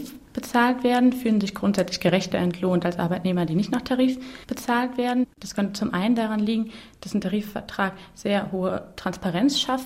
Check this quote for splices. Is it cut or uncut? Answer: cut